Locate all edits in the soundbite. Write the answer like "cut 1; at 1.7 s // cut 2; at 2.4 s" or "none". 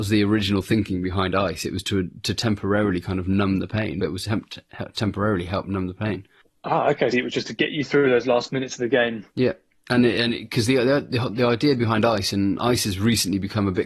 cut 1; at 4.0 s // cut 2; at 7.1 s // cut 3; at 9.3 s

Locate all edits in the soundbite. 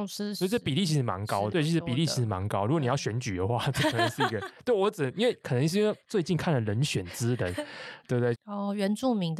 cut 1; at 1.5 s // cut 2; at 8.3 s

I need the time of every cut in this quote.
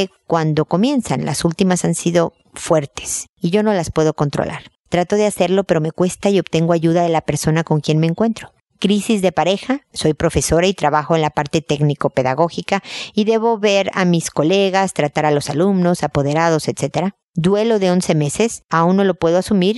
cut 1; at 8.7 s // cut 2; at 9.9 s

